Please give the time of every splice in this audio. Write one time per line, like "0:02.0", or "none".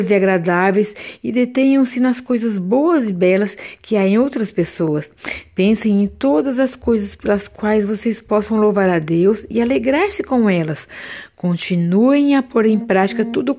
none